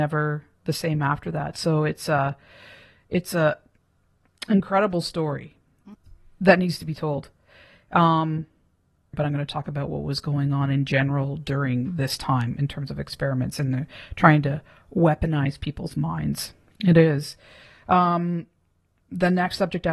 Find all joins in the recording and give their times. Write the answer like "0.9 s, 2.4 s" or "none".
9.1 s, 16.8 s